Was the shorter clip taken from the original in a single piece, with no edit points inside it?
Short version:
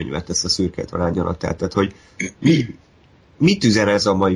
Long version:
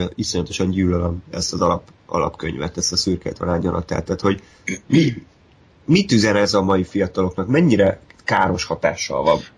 yes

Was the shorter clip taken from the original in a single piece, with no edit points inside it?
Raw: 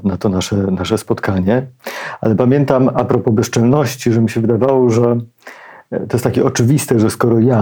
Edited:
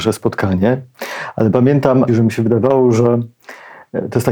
no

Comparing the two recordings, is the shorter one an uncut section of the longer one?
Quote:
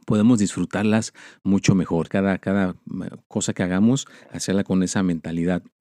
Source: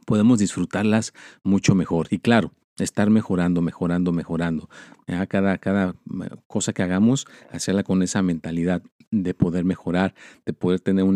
no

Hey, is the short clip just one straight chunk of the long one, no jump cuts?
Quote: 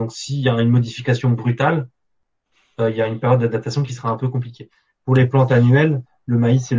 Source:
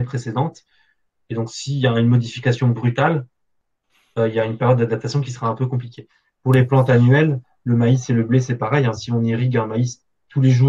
yes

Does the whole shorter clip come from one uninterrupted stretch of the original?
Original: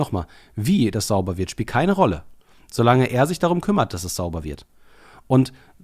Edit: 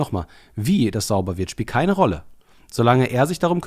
yes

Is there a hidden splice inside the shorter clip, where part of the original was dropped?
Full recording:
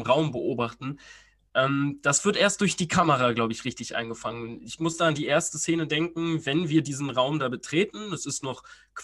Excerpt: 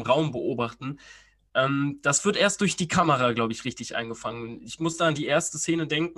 no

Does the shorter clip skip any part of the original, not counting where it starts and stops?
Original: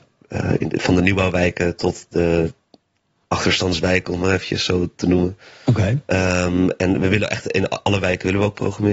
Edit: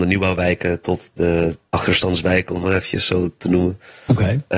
yes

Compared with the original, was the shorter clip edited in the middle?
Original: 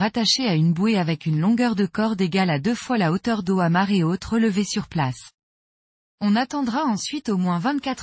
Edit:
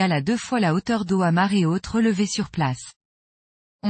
no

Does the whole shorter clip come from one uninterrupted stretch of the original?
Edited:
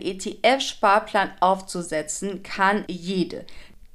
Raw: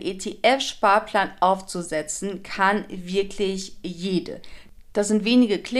no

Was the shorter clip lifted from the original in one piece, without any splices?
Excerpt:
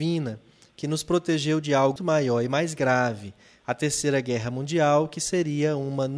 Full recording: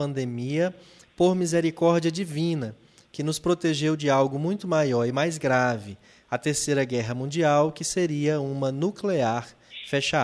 no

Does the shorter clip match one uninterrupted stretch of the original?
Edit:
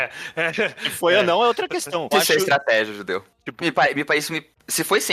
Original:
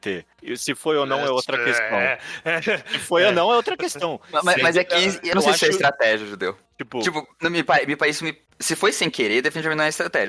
no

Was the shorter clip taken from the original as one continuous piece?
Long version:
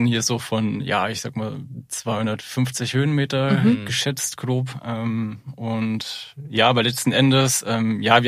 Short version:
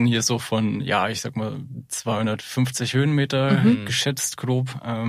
yes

